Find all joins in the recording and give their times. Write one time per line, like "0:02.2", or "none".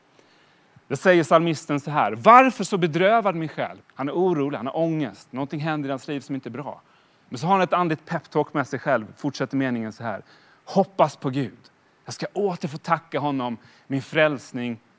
0:03.8